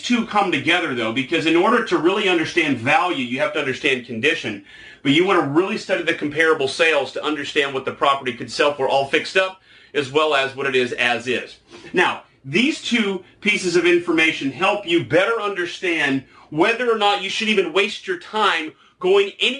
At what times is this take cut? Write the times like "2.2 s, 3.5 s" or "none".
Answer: none

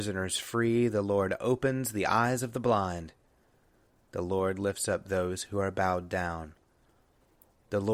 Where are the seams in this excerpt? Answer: none

